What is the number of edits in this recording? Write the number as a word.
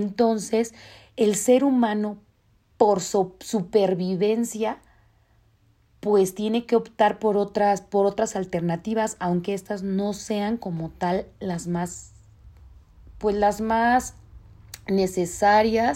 zero